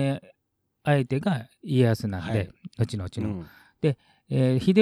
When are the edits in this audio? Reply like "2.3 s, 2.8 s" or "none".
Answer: none